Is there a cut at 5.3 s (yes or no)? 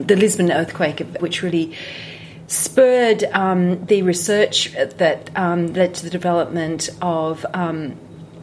no